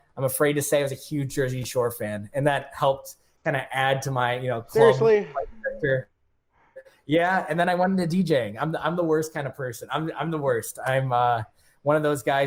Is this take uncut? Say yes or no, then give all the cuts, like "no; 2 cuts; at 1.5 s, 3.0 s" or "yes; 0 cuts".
yes; 0 cuts